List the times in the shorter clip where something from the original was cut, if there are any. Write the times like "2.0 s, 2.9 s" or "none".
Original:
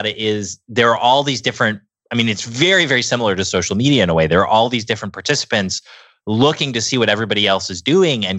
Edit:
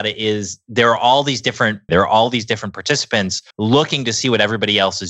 1.9 s, 3.5 s